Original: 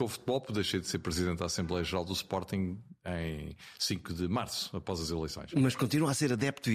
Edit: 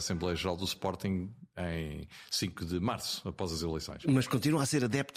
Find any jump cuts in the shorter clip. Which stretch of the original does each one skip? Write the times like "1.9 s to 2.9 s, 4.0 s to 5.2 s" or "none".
none